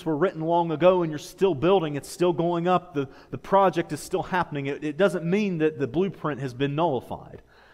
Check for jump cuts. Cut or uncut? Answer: uncut